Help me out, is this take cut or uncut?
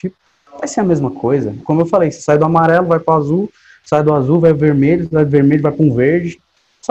cut